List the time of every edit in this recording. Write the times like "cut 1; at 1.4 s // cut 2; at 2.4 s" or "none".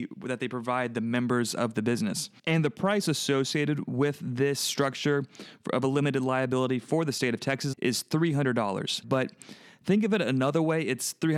cut 1; at 7.7 s // cut 2; at 9.0 s